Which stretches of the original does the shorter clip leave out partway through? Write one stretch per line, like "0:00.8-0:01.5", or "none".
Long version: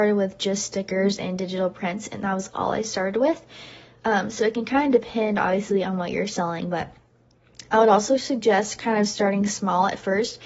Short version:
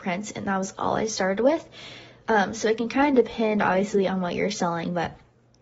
none